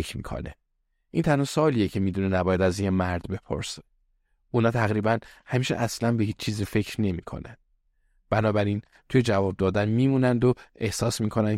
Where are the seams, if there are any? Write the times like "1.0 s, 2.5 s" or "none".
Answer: none